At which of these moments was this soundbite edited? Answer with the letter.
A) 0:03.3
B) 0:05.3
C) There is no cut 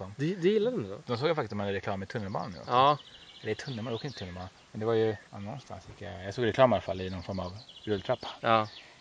B